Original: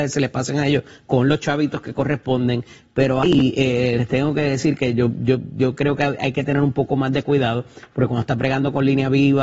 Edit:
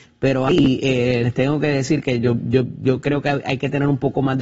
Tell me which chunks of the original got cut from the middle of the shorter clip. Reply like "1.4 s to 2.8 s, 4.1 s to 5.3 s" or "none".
none

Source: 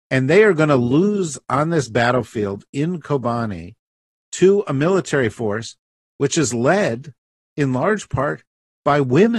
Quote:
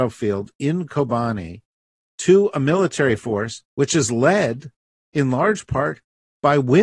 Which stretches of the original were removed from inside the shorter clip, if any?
5.8 s to 6.1 s

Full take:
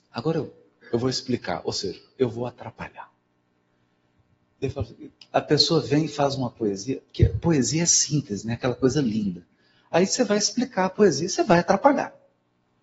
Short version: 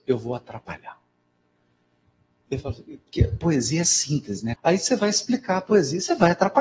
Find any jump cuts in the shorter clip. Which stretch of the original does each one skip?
5.2 s to 7.1 s, 8.6 s to 9.8 s

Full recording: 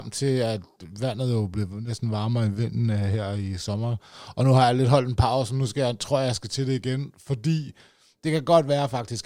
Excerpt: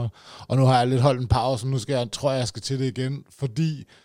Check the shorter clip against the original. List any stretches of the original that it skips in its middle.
none

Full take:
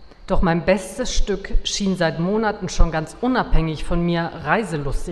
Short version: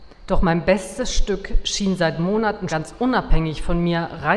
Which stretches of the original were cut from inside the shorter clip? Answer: 2.7 s to 2.9 s

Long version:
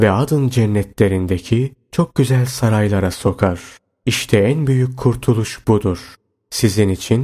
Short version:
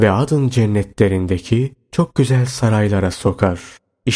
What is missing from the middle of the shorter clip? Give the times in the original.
none

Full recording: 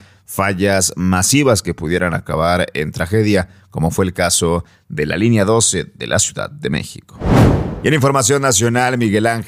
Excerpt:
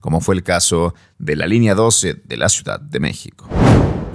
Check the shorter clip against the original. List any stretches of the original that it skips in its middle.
none

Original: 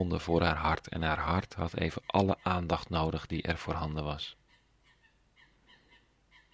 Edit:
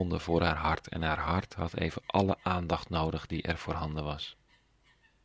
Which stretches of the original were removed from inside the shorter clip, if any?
none

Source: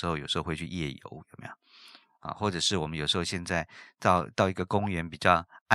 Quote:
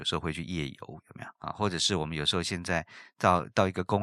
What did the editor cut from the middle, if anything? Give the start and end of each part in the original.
1.6 s to 2.2 s

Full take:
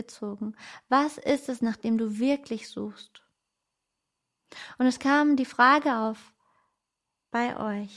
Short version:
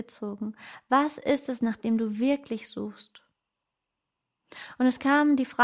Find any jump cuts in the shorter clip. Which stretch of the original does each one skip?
none

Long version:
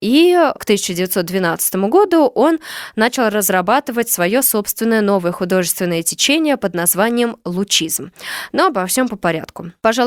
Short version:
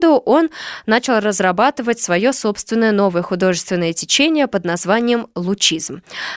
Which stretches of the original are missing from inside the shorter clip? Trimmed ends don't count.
none

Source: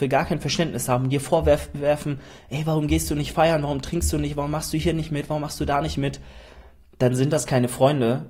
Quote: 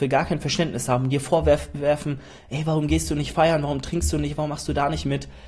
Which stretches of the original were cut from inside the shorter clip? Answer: 4.3 s to 5.3 s

